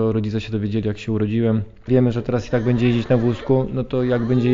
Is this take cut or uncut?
cut